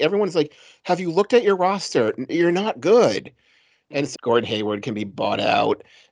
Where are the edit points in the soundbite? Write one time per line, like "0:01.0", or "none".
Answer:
0:04.1